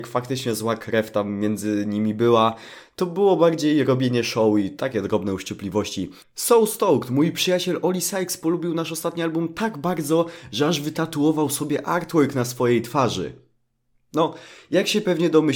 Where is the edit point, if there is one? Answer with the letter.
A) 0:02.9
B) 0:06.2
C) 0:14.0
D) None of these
B